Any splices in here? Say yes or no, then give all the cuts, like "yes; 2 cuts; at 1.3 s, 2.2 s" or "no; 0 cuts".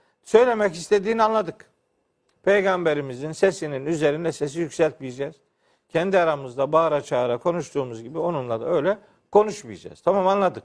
no; 0 cuts